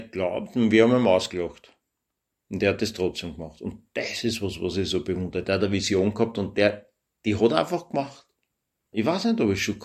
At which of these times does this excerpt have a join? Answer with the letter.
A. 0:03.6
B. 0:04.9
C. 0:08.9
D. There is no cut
C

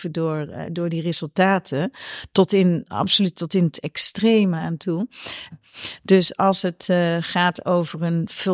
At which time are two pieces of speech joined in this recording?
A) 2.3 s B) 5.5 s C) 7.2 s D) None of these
B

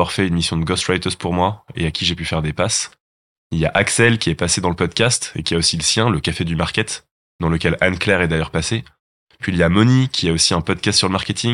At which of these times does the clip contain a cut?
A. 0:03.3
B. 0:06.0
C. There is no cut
C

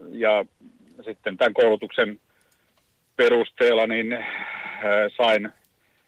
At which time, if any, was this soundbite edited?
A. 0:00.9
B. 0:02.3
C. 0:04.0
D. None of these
D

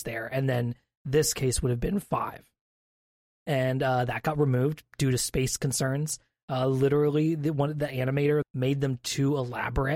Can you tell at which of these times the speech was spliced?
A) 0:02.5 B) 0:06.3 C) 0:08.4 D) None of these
C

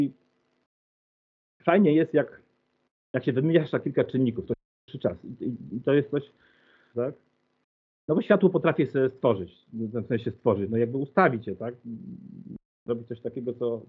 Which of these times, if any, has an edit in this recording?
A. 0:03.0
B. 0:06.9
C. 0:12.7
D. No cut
B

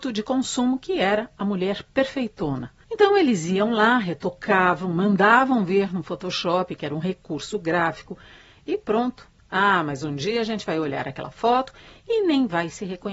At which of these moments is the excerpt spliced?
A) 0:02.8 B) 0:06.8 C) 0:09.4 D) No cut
C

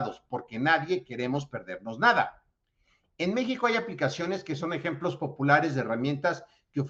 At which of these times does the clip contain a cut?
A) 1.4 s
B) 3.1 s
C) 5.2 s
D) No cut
D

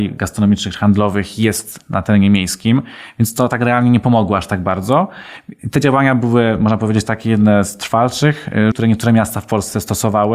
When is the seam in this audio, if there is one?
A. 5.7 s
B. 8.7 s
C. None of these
B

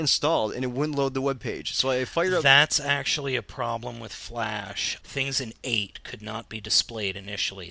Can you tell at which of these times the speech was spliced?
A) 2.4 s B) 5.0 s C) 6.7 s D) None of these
B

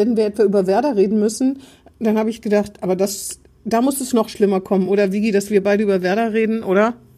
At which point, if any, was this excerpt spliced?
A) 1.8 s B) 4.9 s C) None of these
C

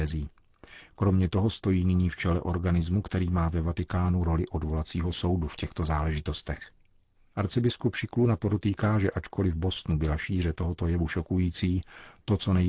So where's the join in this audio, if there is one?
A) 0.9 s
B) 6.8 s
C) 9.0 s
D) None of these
D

